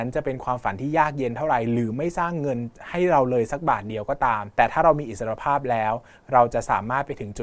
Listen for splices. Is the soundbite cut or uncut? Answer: cut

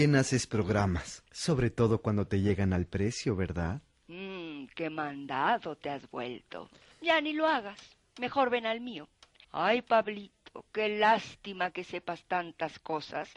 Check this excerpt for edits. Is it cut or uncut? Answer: cut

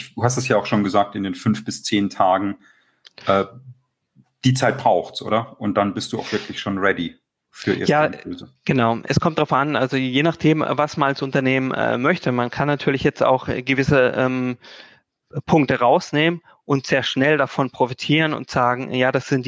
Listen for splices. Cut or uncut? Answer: uncut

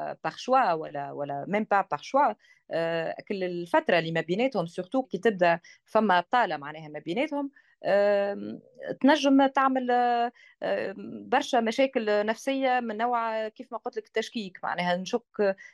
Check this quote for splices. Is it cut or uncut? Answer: cut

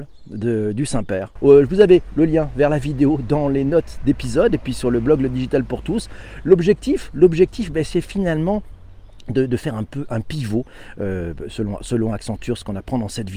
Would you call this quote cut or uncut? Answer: cut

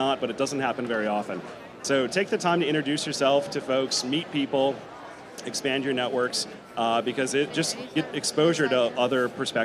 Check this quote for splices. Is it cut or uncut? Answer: cut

